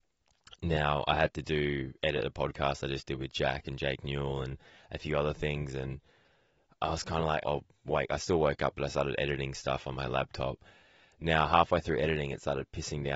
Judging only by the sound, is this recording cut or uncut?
cut